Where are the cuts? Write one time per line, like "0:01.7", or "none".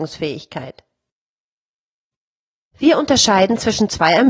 0:02.7